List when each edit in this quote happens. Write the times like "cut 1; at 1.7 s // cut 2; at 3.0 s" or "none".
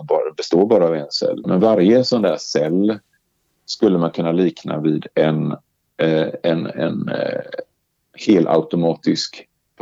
cut 1; at 1.4 s